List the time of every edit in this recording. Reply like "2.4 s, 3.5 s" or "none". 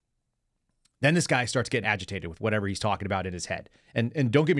1.8 s